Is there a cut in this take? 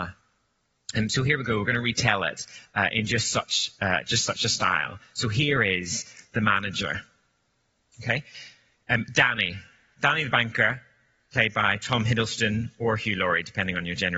no; 0 cuts

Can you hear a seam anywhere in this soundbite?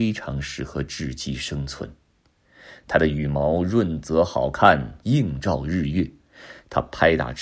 yes; 1 cut; at 5.0 s

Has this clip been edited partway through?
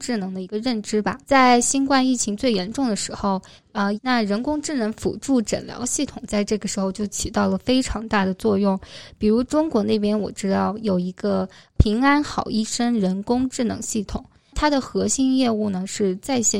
yes; 2 cuts; at 1.2 s, 4.0 s

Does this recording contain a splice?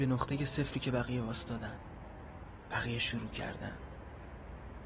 no; 0 cuts

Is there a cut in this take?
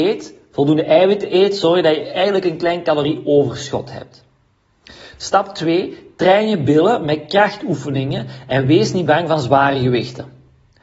no; 0 cuts

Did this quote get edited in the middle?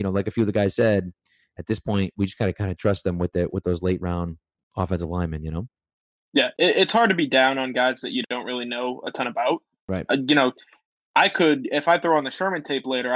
no; 0 cuts

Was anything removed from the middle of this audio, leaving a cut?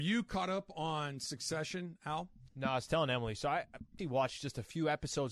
yes; 2 cuts; at 2.5 s, 4.0 s

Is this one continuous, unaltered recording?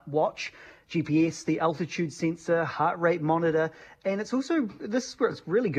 yes; 0 cuts

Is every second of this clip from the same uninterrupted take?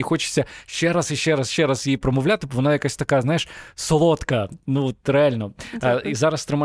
yes; 0 cuts

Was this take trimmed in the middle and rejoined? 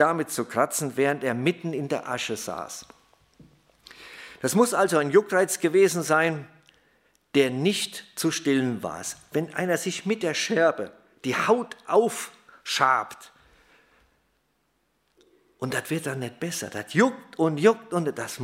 no; 0 cuts

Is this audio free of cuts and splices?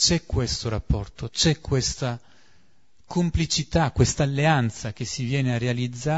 yes; 0 cuts

